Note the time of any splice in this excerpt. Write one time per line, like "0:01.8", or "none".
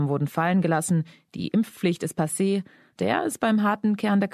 0:03.0